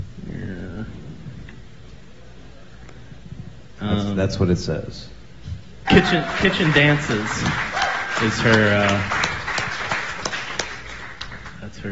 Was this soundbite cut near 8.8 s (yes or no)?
no